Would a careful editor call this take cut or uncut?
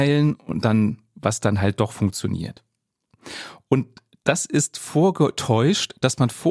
uncut